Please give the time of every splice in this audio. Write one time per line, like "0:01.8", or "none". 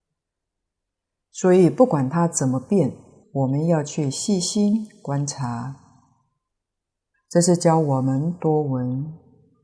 0:03.2
0:07.1